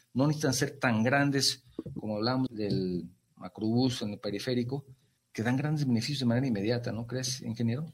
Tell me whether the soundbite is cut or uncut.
cut